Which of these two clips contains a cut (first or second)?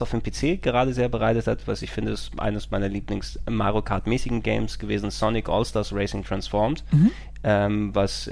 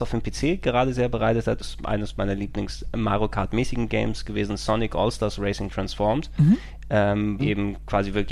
second